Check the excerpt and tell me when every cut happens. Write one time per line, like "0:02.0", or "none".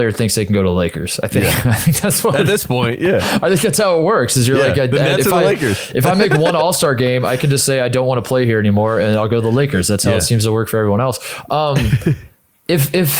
none